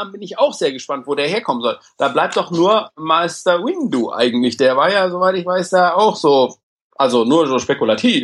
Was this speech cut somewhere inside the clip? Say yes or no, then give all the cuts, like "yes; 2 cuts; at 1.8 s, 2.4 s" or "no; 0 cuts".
no; 0 cuts